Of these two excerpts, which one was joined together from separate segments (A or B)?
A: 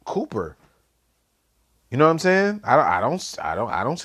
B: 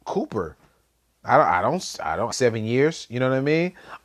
B